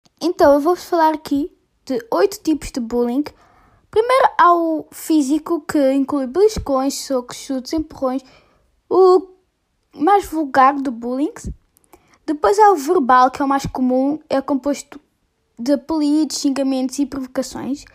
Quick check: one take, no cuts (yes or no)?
yes